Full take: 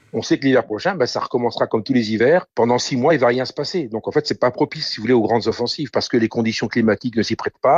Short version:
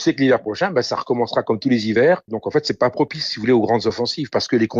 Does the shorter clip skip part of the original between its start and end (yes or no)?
yes